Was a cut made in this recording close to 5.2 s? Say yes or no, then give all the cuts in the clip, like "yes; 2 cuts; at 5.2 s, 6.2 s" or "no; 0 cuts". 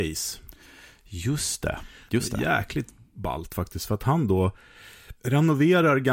yes; 1 cut; at 5.2 s